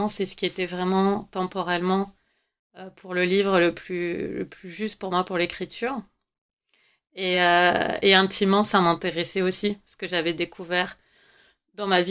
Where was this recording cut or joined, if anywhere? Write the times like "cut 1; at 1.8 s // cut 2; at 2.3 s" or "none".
none